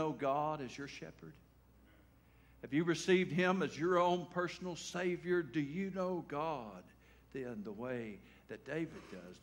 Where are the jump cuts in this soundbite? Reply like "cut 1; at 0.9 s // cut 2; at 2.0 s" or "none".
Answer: none

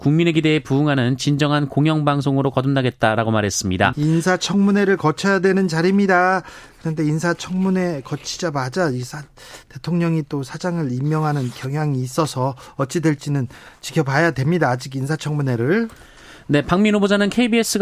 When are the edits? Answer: cut 1; at 3.9 s

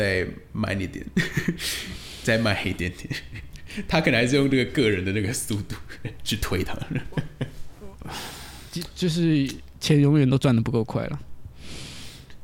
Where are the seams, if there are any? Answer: none

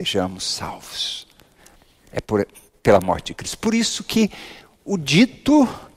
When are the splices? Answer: none

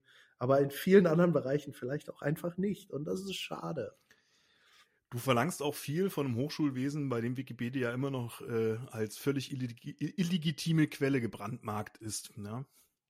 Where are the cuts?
none

